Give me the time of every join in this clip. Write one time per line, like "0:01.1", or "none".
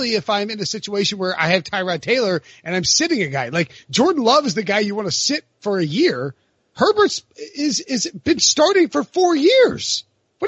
none